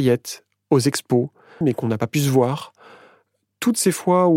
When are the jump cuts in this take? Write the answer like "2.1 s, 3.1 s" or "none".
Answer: 1.6 s